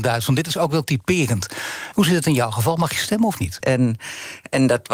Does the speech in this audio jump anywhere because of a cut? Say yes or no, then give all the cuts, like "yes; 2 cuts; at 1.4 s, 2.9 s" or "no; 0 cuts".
yes; 2 cuts; at 1.9 s, 3.6 s